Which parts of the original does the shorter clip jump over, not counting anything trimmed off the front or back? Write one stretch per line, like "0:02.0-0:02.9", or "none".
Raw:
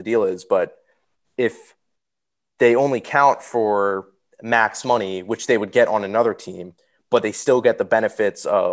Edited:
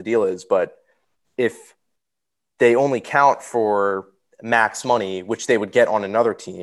none

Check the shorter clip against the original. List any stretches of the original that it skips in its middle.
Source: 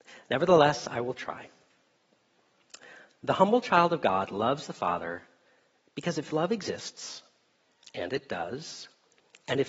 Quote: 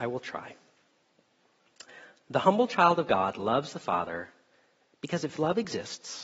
none

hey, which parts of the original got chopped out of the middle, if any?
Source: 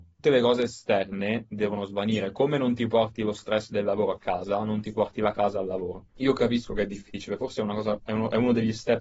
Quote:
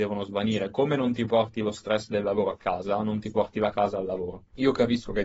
none

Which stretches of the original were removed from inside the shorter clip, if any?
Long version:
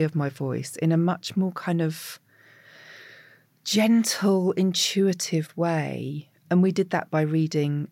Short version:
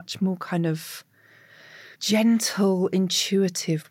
0:03.1-0:03.6

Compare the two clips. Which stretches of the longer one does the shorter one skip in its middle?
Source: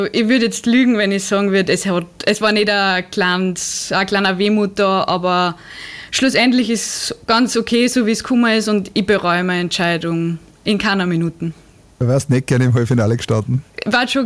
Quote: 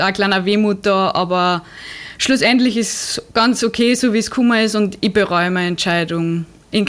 none

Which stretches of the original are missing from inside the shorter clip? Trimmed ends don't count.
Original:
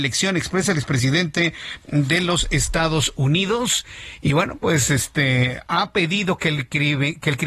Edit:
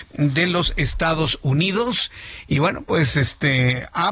none

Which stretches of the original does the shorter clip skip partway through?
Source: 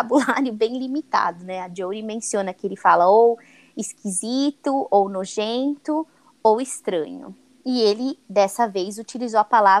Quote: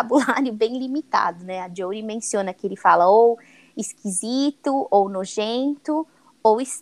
none

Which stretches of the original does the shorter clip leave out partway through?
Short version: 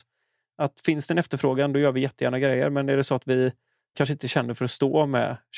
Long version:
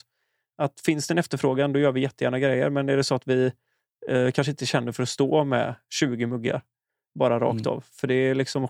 0:03.9-0:04.3

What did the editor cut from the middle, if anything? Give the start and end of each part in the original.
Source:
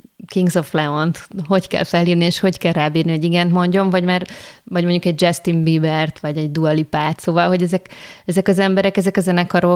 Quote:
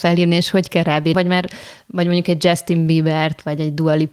0:03.0-0:03.9

